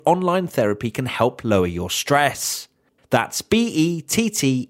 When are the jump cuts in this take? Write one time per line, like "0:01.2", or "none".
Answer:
0:03.0